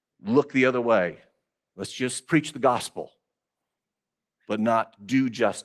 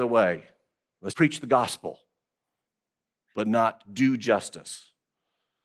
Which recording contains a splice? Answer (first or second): second